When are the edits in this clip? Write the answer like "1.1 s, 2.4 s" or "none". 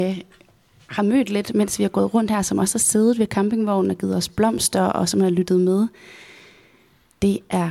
none